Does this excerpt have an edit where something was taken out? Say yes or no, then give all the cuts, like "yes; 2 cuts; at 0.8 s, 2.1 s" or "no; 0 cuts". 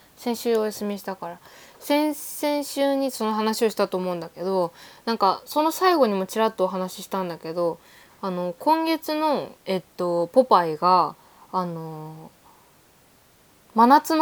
yes; 1 cut; at 9.6 s